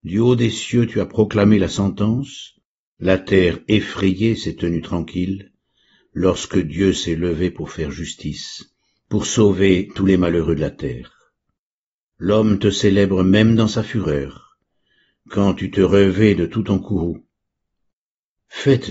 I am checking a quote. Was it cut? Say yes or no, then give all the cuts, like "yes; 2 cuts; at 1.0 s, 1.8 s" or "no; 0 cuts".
no; 0 cuts